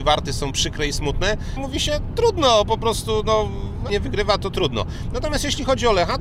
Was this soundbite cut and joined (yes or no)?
yes